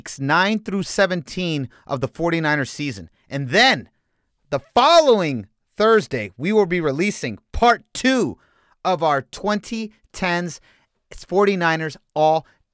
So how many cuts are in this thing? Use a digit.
0